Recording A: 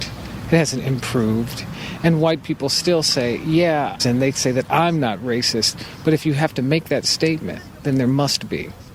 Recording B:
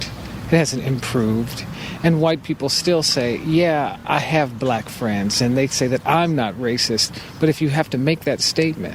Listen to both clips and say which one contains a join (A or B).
A